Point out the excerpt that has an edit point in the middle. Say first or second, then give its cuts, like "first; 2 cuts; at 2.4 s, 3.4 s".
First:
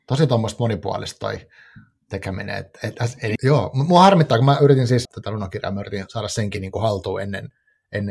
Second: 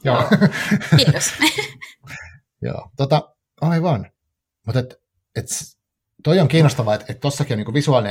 first; 2 cuts; at 3.4 s, 5.1 s